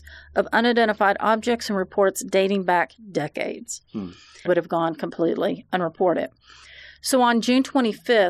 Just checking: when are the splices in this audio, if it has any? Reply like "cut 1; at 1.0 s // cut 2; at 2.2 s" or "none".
cut 1; at 4.5 s

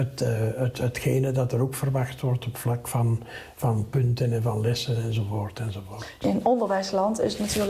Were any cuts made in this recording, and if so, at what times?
none

